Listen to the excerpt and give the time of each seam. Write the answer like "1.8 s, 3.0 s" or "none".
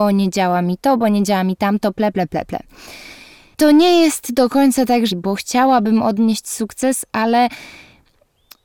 5.1 s